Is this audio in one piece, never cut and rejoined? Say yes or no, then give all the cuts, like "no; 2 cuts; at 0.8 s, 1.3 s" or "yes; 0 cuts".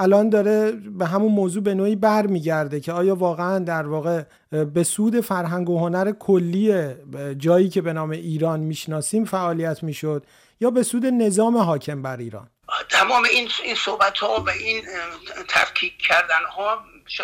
yes; 0 cuts